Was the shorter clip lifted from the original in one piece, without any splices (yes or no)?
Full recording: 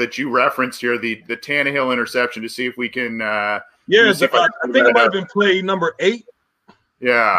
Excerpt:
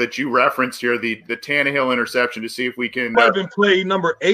no